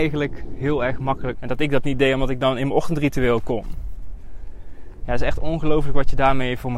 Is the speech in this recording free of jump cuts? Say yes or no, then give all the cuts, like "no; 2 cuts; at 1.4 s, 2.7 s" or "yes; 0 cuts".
no; 2 cuts; at 1.3 s, 5.0 s